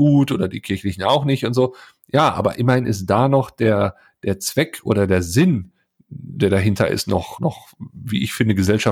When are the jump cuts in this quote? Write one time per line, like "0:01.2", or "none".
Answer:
0:07.4